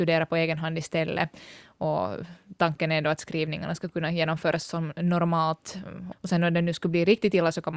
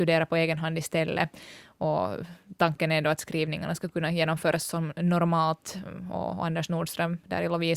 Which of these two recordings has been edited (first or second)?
first